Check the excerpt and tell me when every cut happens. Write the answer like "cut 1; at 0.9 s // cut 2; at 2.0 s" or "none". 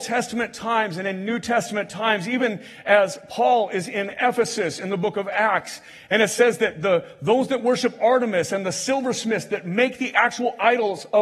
none

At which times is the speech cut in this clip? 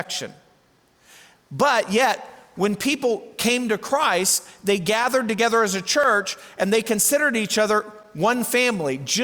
none

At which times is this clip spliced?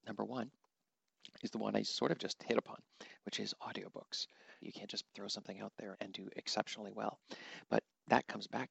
cut 1; at 4.6 s // cut 2; at 5.9 s

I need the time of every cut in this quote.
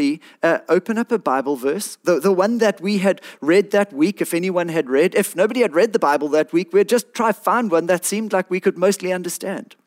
none

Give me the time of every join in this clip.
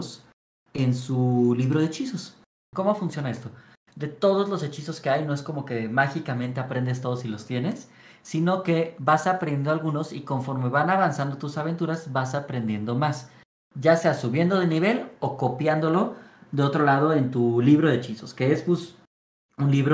cut 1; at 2.7 s

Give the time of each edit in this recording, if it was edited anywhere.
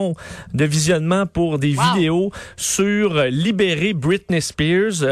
none

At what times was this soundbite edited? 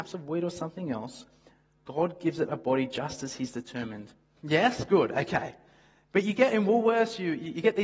cut 1; at 4.4 s

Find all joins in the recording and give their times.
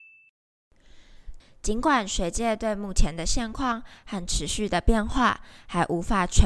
cut 1; at 1.4 s

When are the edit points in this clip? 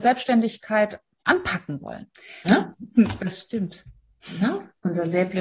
cut 1; at 2.4 s

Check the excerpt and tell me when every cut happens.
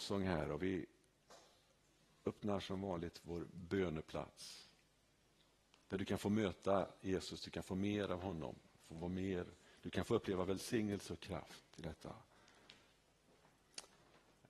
none

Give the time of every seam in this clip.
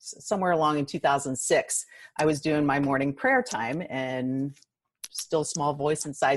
none

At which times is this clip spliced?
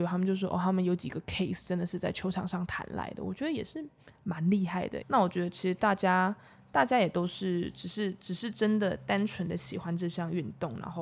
cut 1; at 5.0 s // cut 2; at 8.5 s

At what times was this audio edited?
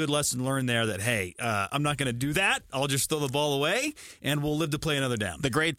none

